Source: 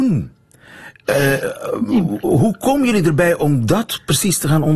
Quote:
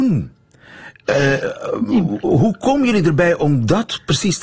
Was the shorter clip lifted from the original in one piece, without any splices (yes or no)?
yes